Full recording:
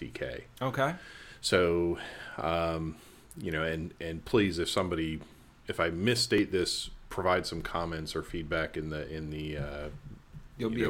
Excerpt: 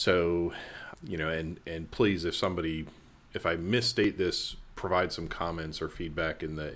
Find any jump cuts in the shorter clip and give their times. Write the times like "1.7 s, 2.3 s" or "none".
0.9 s